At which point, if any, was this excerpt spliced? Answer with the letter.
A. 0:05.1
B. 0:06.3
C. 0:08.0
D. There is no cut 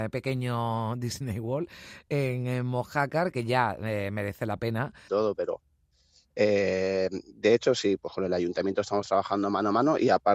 A